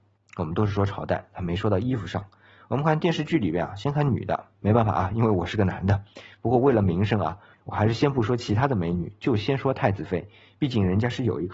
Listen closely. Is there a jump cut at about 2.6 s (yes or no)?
yes